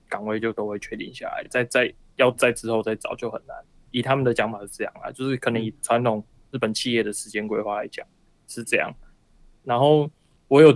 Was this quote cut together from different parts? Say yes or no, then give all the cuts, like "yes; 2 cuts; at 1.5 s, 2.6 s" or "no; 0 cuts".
no; 0 cuts